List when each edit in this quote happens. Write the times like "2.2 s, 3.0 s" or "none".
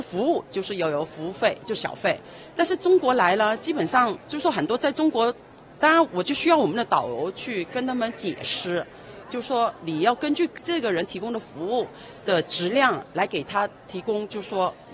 5.7 s, 9.2 s